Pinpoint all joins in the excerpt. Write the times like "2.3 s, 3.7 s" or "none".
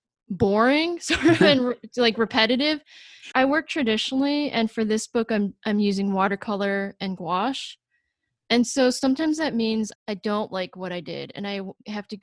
3.3 s, 9.9 s